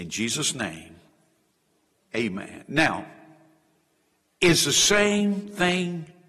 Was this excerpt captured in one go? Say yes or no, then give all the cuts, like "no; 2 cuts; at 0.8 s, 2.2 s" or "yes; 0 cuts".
yes; 0 cuts